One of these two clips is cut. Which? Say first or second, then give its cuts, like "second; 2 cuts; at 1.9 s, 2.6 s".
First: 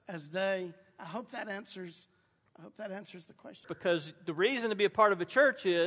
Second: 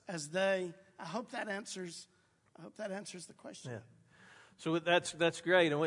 first; 1 cut; at 3.6 s